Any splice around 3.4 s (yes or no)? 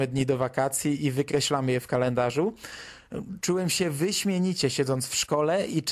no